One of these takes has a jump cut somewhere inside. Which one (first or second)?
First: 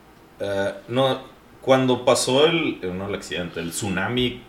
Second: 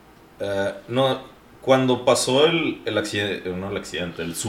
first